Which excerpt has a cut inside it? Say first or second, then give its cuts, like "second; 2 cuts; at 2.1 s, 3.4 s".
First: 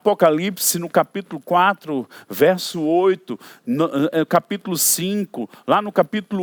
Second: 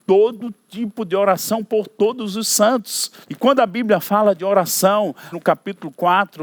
second; 2 cuts; at 3.2 s, 5.3 s